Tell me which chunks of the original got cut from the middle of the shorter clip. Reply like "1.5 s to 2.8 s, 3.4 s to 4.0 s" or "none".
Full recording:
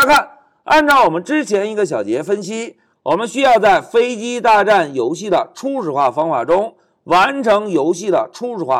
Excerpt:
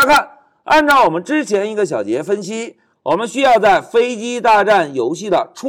none